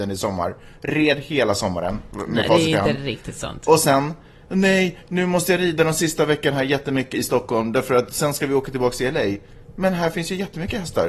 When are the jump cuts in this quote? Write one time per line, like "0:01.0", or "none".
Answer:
0:07.1

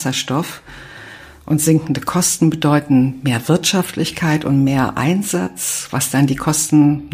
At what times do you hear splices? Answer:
none

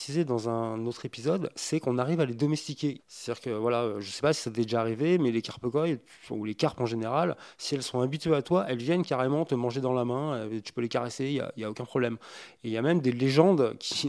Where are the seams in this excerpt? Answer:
0:03.0

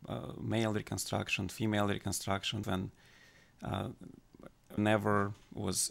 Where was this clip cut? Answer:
0:02.6
0:04.8

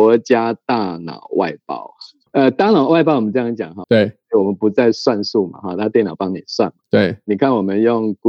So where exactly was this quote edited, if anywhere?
0:02.3
0:03.8

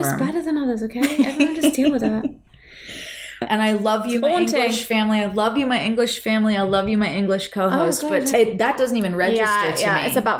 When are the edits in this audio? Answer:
0:08.3

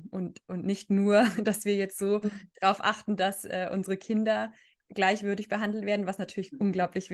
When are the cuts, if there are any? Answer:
none

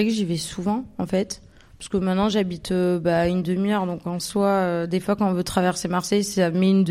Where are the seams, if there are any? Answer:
none

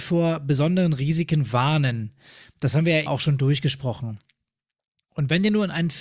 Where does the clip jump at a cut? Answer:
0:03.1

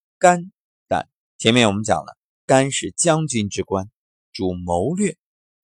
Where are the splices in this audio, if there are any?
0:01.3

